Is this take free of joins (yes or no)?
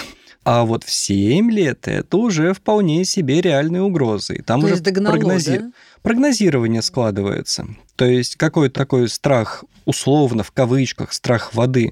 no